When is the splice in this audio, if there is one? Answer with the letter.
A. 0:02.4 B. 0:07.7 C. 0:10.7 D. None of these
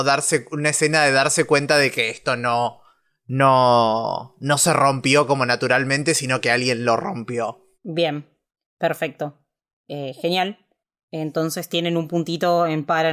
B